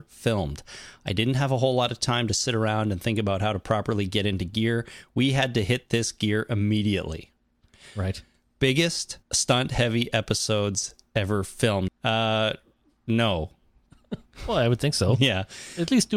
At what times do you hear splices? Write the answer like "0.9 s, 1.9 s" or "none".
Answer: 9.2 s, 11.9 s, 13.9 s